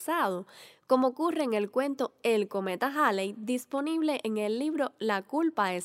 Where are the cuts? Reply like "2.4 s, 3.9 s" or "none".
none